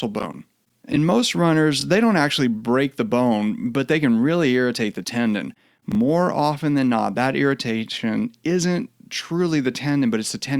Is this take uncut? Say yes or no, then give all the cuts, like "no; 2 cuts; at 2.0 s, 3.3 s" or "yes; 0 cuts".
yes; 0 cuts